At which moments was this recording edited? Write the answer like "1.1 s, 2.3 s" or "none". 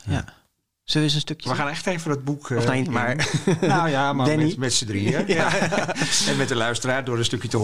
1.4 s, 2.8 s